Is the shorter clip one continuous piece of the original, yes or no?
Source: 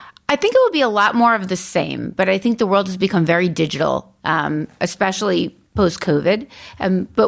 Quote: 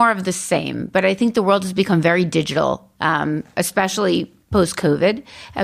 yes